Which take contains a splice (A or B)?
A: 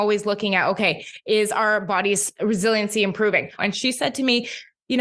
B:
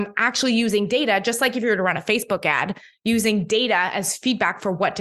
A